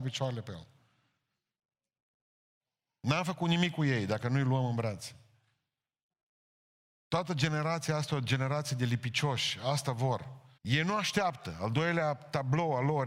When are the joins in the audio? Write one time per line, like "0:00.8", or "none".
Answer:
0:10.6